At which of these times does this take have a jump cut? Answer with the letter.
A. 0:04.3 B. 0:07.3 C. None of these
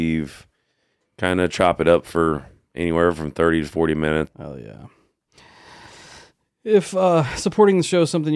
A